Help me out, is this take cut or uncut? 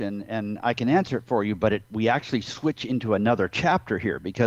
uncut